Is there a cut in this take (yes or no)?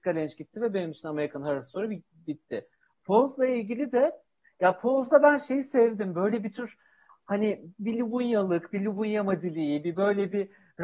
no